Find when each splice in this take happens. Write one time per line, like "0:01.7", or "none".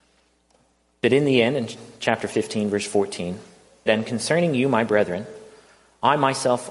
0:03.9